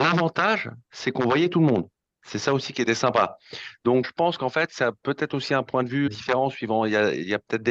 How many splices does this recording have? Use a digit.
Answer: 2